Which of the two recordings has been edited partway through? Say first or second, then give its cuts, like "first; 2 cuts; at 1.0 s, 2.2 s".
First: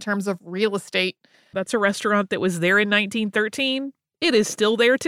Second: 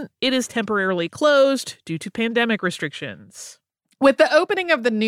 first; 1 cut; at 1.5 s